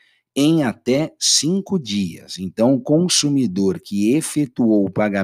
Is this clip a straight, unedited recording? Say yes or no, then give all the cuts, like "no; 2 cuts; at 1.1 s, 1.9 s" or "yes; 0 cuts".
yes; 0 cuts